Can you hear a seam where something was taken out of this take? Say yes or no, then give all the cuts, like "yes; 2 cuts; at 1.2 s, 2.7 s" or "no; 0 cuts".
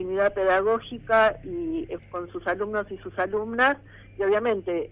yes; 1 cut; at 2.0 s